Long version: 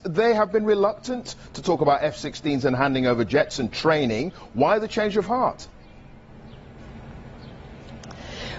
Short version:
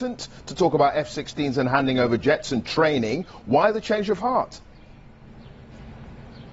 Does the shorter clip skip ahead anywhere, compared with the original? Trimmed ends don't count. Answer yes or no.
no